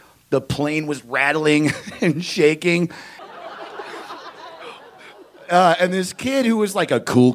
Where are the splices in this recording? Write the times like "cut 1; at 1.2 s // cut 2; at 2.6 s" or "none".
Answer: cut 1; at 3.2 s